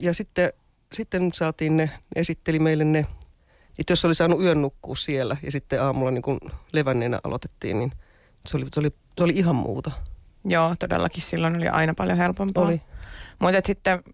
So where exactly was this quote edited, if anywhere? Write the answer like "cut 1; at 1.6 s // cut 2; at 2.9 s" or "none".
cut 1; at 2.0 s // cut 2; at 3.7 s